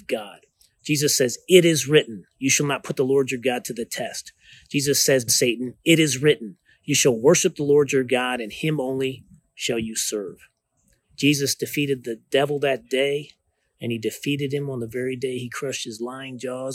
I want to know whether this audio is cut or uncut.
cut